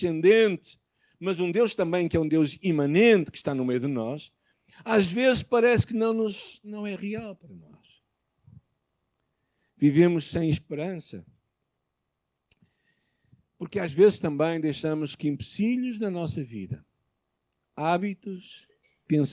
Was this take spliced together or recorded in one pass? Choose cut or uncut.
uncut